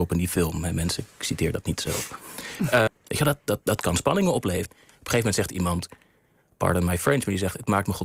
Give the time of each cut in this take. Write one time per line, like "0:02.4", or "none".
0:02.9
0:04.7